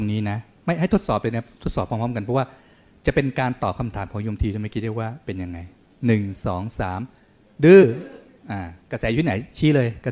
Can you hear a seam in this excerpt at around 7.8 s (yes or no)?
no